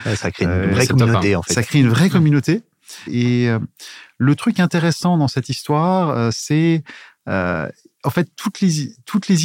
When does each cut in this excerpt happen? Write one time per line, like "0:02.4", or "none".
0:03.1